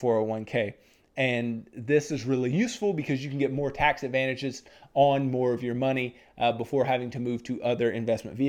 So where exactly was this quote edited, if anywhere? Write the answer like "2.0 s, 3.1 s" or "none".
none